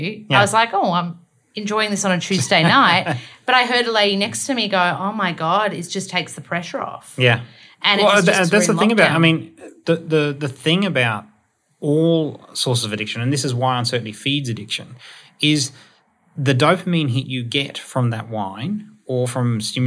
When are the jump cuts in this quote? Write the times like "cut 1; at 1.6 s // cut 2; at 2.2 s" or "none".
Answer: none